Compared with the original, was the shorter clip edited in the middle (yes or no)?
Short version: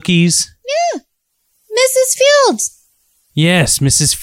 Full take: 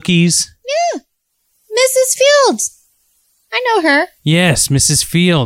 yes